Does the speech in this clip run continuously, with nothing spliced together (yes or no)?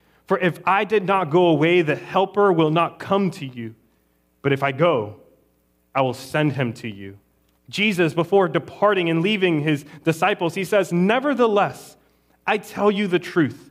no